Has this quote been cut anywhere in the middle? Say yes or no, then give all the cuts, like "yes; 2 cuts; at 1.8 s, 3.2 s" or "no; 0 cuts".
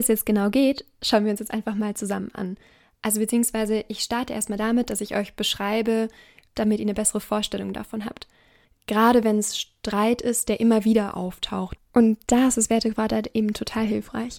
yes; 3 cuts; at 6.5 s, 8.6 s, 11.8 s